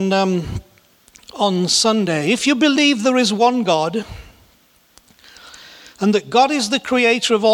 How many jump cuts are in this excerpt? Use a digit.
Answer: 0